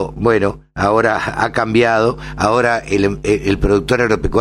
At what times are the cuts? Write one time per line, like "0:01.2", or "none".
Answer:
none